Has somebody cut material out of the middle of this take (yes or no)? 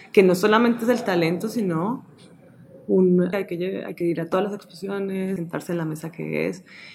yes